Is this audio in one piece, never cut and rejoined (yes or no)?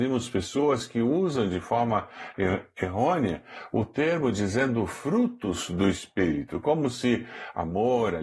yes